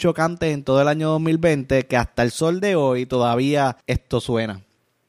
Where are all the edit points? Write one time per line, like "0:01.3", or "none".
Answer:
0:03.8